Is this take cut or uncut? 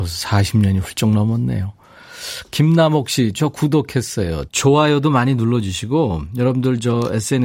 cut